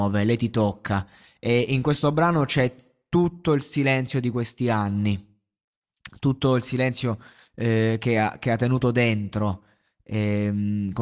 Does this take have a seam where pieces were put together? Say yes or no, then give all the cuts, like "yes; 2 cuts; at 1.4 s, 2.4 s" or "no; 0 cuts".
no; 0 cuts